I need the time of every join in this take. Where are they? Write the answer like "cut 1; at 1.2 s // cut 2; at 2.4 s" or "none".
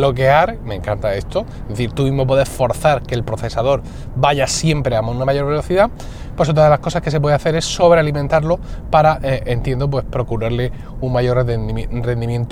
none